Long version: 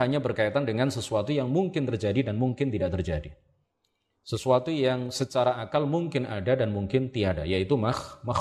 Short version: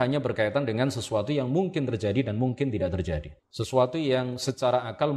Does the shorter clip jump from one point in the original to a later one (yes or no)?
yes